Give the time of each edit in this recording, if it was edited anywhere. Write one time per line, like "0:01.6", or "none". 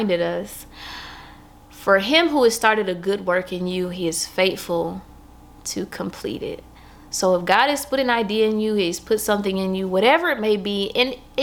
none